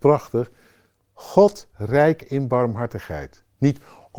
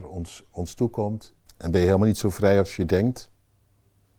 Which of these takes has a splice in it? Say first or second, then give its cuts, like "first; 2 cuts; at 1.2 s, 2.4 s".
second; 1 cut; at 1.5 s